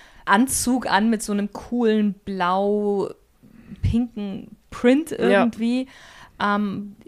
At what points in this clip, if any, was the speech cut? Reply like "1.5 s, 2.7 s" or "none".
none